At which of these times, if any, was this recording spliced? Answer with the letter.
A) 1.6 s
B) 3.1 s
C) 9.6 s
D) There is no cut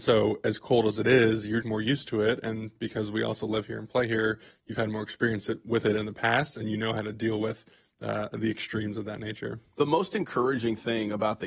A